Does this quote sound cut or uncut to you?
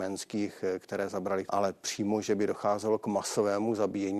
cut